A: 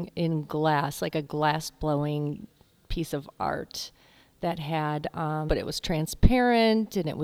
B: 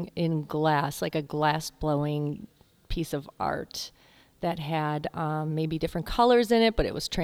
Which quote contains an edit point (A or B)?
A